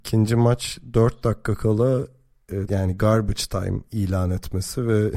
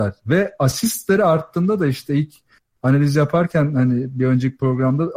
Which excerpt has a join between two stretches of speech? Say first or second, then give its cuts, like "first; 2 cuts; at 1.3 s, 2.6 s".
first; 1 cut; at 2.7 s